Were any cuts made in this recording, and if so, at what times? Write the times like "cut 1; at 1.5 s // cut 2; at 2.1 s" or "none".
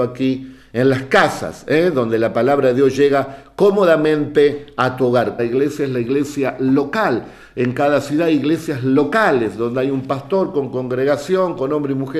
cut 1; at 5.4 s